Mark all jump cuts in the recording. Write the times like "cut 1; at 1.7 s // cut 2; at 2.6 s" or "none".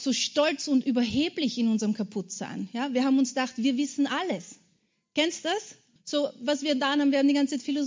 cut 1; at 6.0 s